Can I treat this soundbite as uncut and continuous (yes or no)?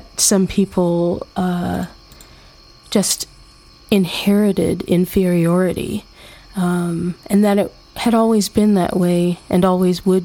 yes